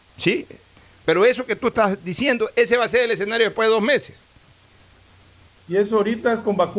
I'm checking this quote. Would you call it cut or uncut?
cut